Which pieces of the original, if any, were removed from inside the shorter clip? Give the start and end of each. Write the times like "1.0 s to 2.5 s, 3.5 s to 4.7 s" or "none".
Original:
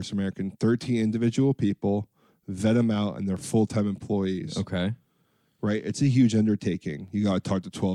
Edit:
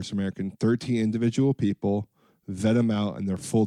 none